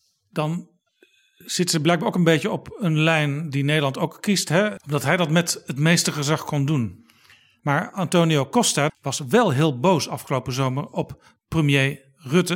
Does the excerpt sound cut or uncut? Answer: cut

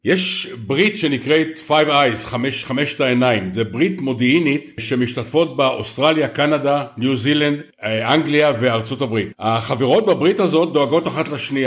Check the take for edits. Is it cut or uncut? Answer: uncut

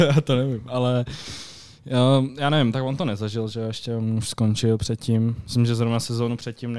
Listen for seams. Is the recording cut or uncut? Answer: uncut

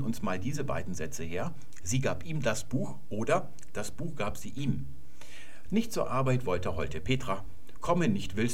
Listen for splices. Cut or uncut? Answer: cut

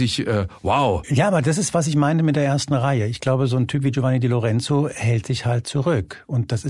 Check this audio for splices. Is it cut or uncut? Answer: uncut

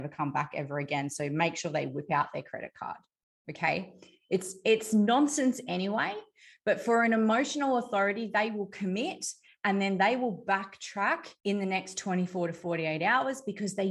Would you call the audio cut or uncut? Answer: cut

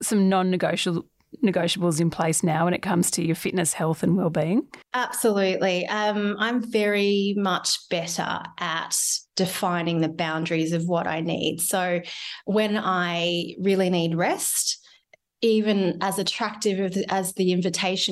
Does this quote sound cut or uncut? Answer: uncut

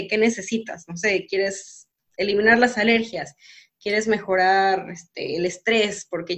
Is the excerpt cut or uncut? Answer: uncut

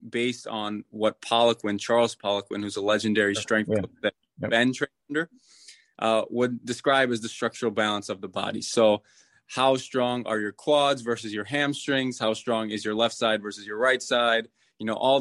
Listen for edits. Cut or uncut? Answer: uncut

